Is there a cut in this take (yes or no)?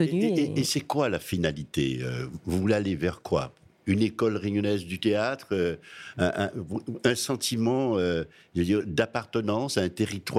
no